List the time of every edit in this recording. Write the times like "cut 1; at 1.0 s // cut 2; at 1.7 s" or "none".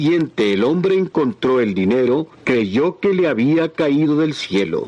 cut 1; at 2.3 s

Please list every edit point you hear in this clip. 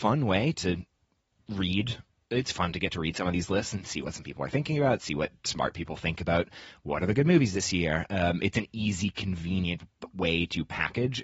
none

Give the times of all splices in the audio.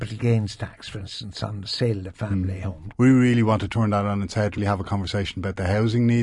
cut 1; at 2.9 s // cut 2; at 4.6 s

